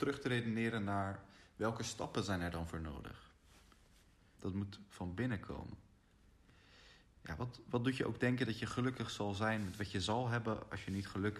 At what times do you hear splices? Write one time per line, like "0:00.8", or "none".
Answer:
0:04.3